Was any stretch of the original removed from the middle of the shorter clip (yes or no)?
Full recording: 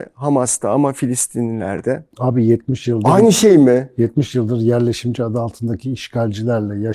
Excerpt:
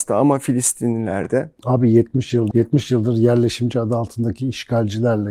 yes